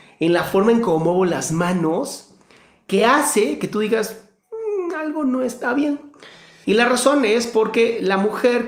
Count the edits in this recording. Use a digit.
1